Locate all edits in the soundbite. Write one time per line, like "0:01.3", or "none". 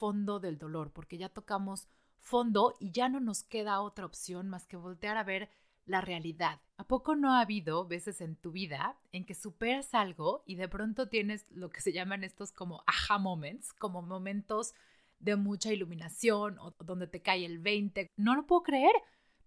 0:06.7
0:16.7
0:18.1